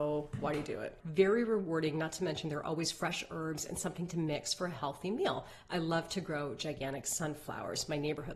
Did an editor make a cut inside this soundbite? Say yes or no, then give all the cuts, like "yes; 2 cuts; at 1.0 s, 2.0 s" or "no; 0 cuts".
yes; 1 cut; at 1.0 s